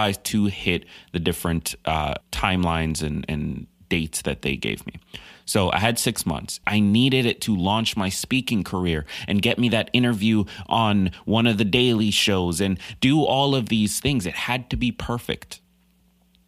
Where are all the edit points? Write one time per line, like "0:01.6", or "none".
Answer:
0:02.2
0:06.6